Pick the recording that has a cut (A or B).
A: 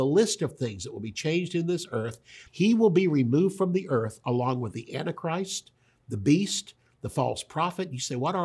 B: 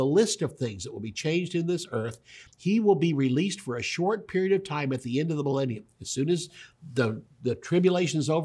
A